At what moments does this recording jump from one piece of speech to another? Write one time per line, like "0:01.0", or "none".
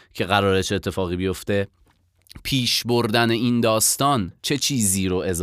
0:04.4